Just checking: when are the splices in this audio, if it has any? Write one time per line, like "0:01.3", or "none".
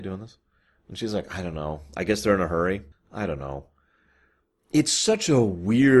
0:02.9